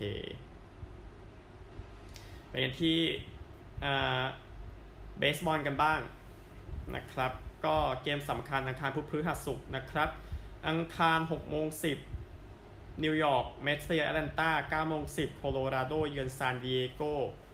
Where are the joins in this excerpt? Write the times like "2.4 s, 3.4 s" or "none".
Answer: none